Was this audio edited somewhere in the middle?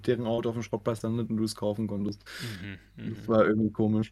no; 0 cuts

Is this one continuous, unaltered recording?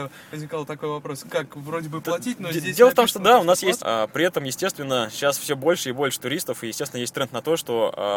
no; 1 cut; at 3.8 s

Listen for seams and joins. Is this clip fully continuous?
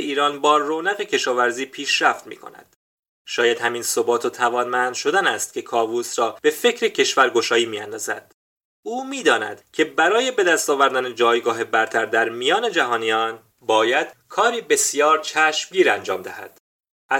yes; 0 cuts

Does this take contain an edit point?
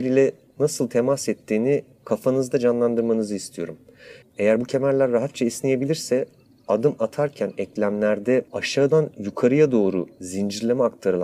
yes; 2 cuts; at 4.2 s, 8.5 s

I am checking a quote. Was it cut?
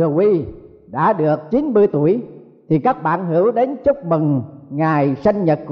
no; 0 cuts

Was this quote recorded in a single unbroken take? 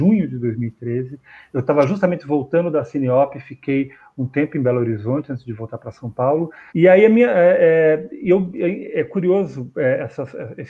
no; 1 cut; at 6.7 s

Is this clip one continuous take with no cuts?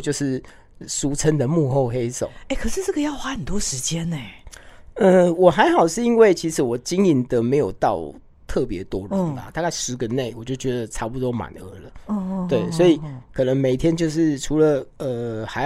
yes; 0 cuts

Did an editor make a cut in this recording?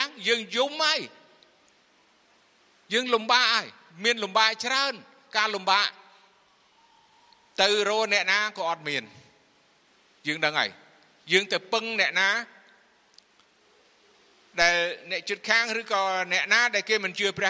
no; 0 cuts

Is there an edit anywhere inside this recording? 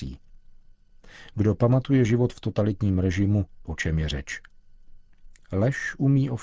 yes; 1 cut; at 3.6 s

